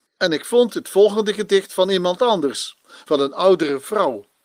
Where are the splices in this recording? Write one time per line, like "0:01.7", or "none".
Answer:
none